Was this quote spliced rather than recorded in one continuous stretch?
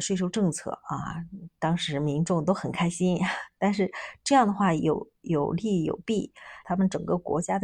yes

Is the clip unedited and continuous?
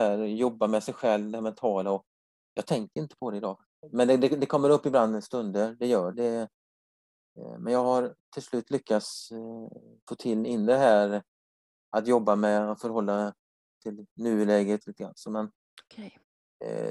no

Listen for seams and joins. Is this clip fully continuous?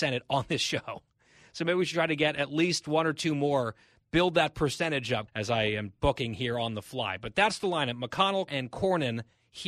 no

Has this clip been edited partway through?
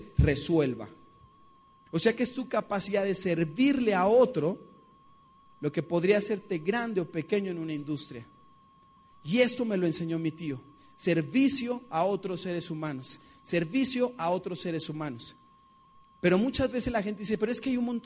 yes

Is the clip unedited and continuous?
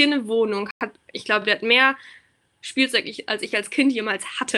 yes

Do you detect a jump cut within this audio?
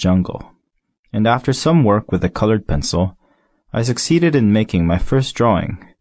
no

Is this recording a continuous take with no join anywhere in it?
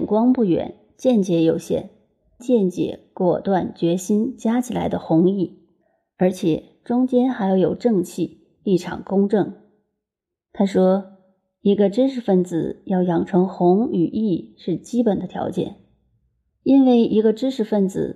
no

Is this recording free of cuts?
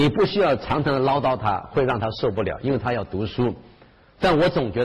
yes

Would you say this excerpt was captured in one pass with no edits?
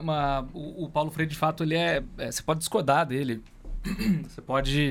yes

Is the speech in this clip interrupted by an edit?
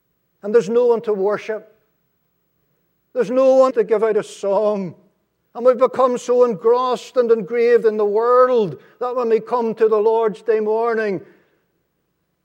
yes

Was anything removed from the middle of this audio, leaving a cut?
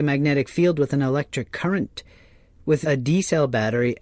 yes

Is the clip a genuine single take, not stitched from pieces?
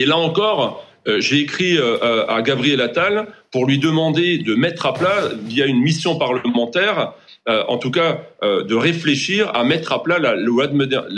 yes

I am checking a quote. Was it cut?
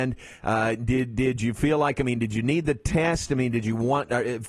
no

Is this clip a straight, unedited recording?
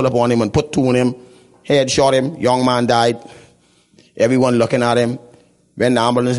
yes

